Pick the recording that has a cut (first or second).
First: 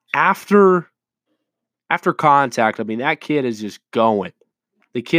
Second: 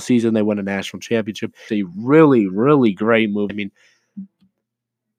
second